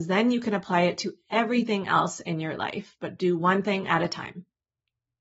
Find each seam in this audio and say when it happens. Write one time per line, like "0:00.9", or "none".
none